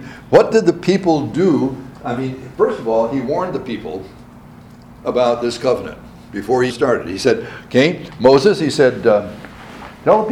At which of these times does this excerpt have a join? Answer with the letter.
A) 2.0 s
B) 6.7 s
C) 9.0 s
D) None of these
B